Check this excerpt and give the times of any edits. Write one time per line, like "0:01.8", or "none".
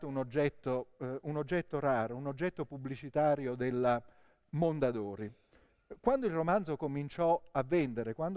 none